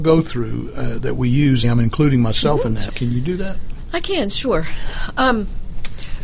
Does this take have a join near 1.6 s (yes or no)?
yes